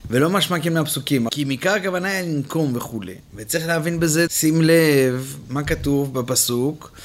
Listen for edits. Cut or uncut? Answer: cut